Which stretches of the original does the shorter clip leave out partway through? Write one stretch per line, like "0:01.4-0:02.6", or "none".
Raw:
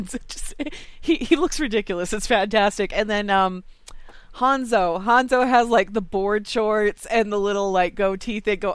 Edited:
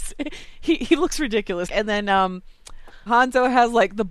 0:02.1-0:02.9
0:04.3-0:05.0